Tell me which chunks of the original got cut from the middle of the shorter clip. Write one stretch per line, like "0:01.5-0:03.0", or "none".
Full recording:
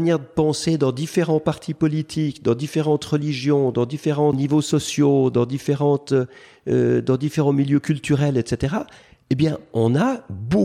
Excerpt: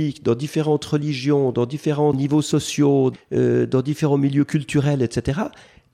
0:05.3-0:06.5